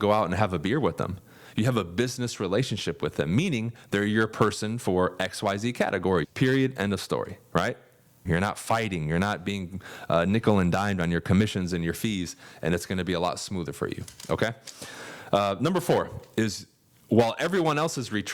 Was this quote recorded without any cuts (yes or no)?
no